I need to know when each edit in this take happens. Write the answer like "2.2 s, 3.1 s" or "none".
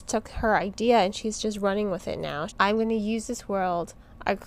2.5 s